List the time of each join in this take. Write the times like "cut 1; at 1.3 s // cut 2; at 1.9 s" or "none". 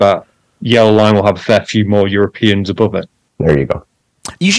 cut 1; at 3.3 s